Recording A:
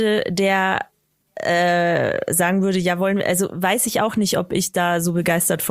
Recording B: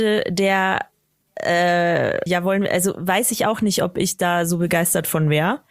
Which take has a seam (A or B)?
B